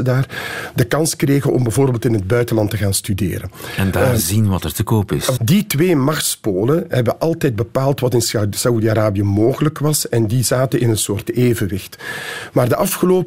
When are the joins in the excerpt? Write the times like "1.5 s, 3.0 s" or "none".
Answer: 5.4 s